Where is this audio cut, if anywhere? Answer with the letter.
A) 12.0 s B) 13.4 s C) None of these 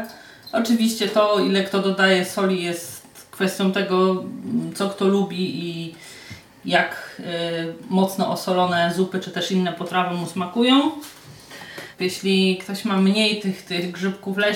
A